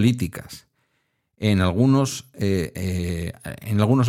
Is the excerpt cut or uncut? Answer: uncut